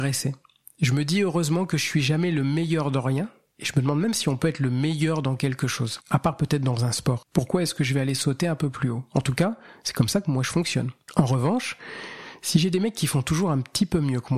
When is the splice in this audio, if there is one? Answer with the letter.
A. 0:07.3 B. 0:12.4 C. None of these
A